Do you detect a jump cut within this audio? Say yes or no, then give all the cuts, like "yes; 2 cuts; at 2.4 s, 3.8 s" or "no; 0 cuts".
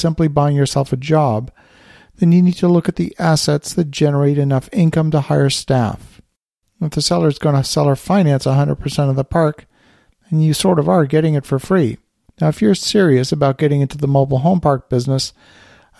yes; 2 cuts; at 6.6 s, 12.3 s